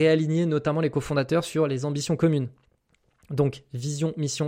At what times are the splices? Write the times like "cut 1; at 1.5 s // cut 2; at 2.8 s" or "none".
none